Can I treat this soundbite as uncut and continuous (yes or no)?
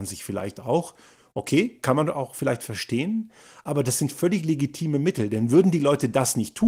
yes